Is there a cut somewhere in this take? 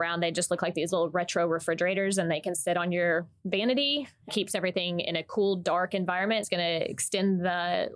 no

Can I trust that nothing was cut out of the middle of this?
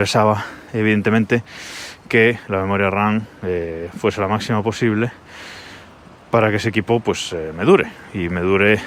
yes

